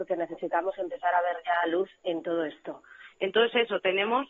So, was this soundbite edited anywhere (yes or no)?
yes